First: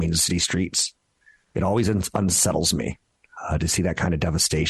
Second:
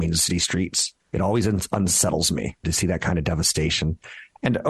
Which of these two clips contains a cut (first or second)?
second